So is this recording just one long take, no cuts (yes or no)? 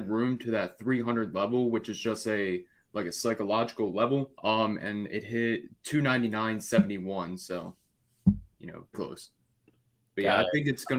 no